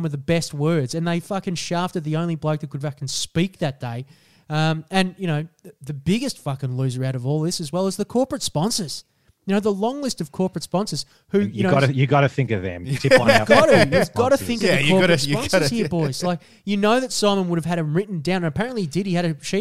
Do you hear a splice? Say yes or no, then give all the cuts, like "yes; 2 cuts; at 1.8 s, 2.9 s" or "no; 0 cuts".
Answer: no; 0 cuts